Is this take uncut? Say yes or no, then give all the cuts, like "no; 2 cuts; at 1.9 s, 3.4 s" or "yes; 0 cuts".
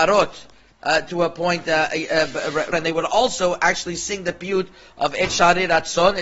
no; 1 cut; at 2.7 s